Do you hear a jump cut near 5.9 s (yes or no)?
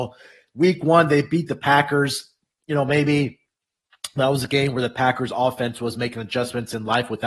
no